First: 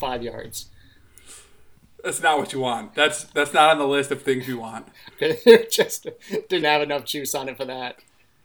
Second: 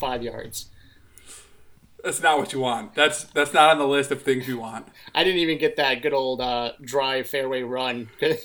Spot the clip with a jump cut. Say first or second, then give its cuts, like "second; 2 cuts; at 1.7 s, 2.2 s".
first; 2 cuts; at 5.1 s, 6.6 s